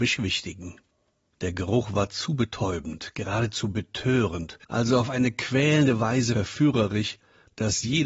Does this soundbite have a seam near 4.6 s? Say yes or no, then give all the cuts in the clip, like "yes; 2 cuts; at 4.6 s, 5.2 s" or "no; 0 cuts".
yes; 2 cuts; at 1.3 s, 4.6 s